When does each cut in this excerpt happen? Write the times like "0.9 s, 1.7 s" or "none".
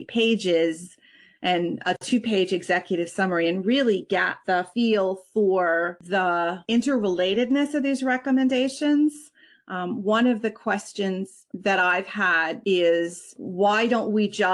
none